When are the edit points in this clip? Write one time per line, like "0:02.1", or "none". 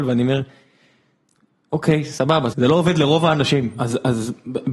0:02.5